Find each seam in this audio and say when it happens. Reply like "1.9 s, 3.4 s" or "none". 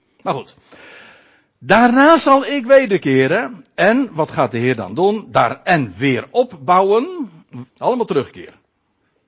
7.7 s